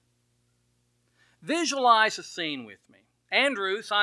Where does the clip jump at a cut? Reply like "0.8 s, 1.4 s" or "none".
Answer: none

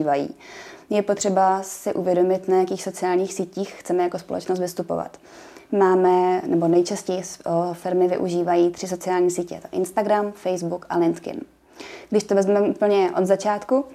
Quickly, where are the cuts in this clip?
none

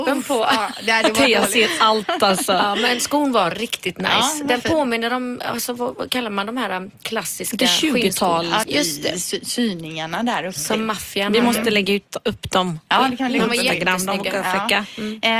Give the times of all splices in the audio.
8.6 s

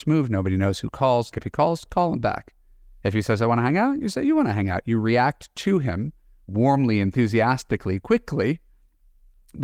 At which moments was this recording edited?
1.3 s

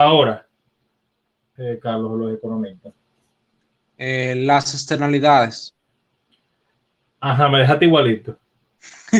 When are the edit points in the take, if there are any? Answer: 1.6 s

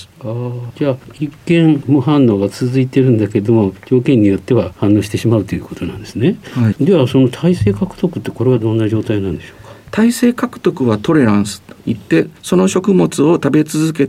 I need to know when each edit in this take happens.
6.7 s

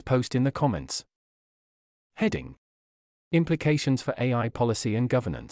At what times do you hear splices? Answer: none

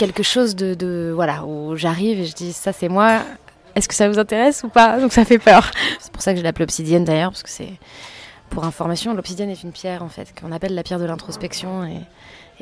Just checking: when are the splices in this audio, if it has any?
6.0 s

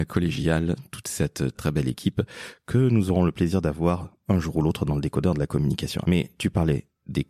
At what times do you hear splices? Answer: 1.5 s, 6.0 s

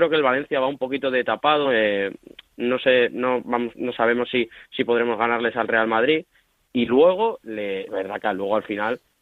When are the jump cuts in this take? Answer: 1.6 s, 7.9 s

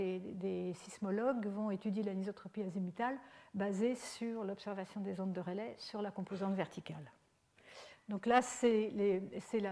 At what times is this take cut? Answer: 7.9 s

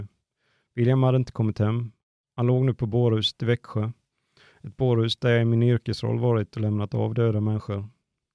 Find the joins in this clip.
none

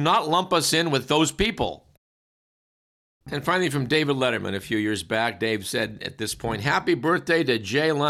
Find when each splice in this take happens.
3.2 s

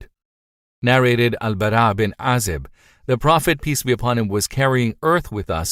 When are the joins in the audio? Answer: none

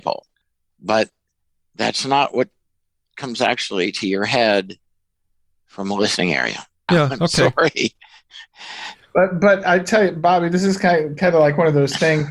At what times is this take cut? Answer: 6.9 s

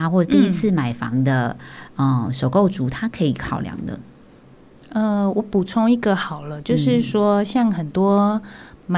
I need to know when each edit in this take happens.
none

